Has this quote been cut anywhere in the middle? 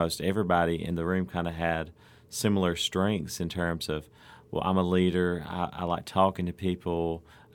no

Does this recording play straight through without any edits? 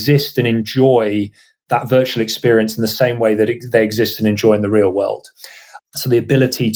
no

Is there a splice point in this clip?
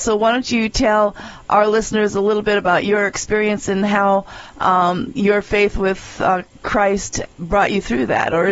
yes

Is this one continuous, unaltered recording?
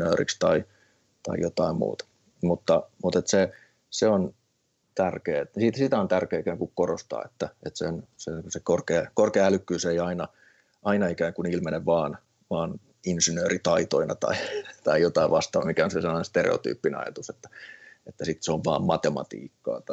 yes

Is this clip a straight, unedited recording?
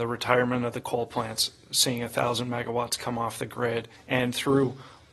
no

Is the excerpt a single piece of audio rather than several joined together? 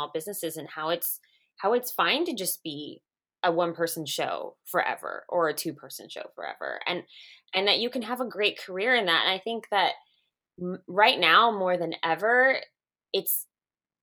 yes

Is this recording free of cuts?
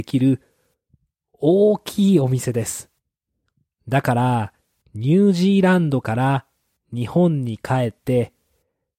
no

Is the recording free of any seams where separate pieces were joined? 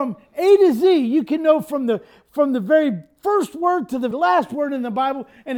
no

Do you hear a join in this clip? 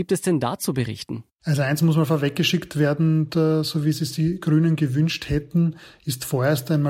yes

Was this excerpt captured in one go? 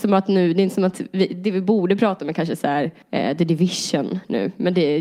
yes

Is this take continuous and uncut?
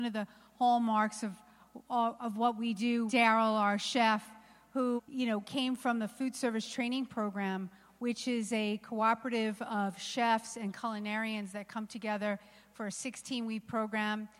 no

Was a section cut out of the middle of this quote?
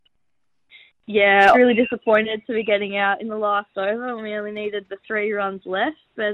yes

